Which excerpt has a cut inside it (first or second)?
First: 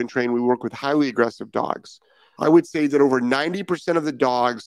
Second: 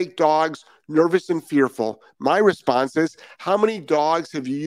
first